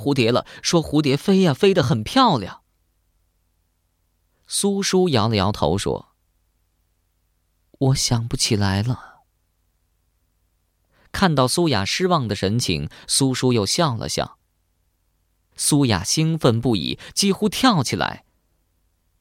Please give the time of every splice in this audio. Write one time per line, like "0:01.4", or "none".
0:15.5